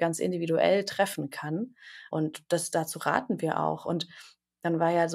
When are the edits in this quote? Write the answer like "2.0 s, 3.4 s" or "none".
2.1 s